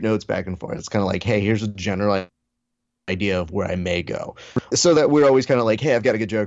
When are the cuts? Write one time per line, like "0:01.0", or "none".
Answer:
0:04.7